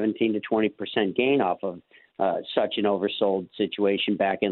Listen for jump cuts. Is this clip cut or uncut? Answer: uncut